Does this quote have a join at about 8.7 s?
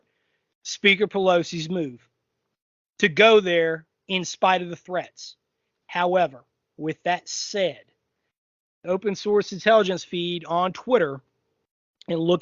yes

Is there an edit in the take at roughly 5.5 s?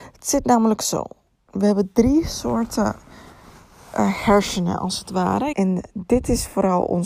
yes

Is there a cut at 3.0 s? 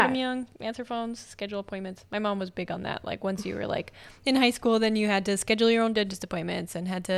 no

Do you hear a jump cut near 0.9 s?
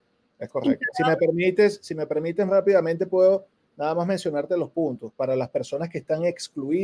yes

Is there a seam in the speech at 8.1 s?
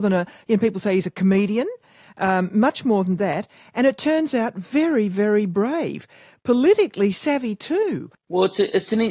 yes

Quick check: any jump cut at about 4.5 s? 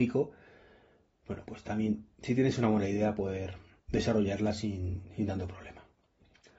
no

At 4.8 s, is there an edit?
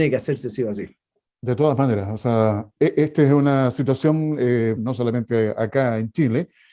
yes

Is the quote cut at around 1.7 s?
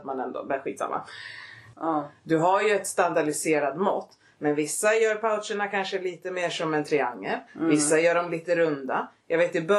yes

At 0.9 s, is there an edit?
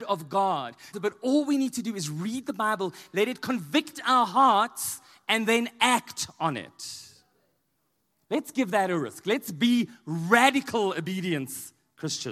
yes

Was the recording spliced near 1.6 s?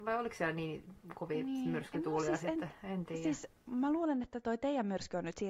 no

